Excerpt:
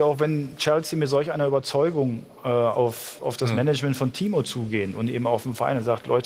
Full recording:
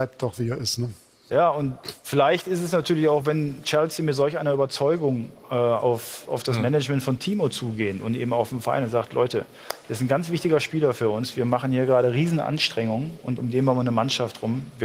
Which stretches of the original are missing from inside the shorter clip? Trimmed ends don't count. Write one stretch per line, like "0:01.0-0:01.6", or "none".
none